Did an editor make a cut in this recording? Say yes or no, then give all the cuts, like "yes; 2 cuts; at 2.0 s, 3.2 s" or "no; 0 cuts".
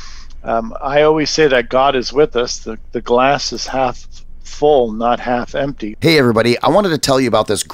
yes; 1 cut; at 5.9 s